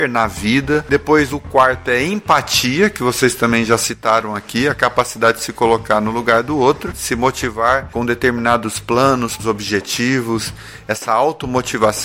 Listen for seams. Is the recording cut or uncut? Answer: cut